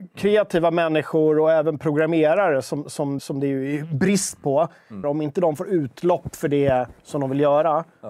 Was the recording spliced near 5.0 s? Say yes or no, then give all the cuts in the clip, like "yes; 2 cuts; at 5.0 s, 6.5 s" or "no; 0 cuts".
yes; 2 cuts; at 3.2 s, 5.0 s